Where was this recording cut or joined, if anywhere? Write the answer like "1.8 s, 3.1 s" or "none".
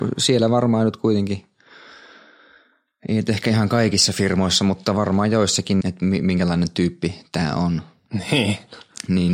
5.8 s

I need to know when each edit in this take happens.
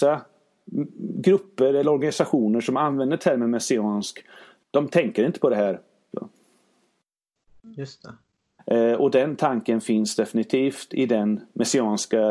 6.1 s, 8.6 s

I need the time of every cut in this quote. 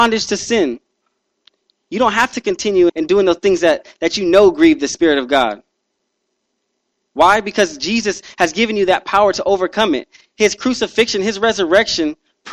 2.9 s

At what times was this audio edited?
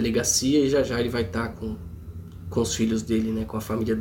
1.5 s

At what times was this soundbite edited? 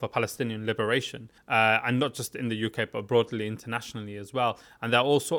1.4 s

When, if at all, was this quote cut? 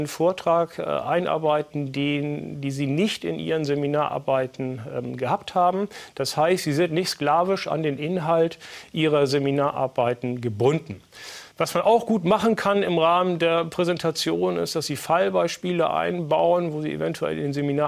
11.5 s

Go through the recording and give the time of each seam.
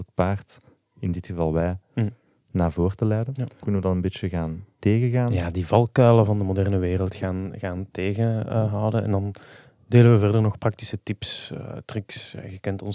3.6 s

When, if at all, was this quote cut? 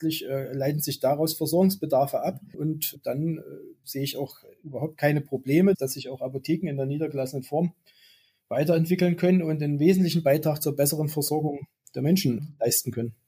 2.5 s

